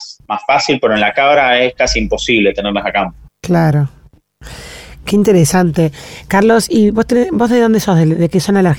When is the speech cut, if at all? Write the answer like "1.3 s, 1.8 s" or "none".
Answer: 3.3 s